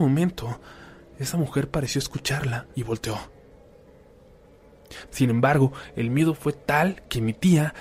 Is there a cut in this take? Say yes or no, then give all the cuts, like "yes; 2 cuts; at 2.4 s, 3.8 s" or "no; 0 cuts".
yes; 2 cuts; at 2.7 s, 5.1 s